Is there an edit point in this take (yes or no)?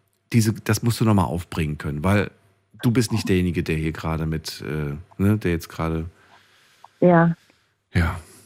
no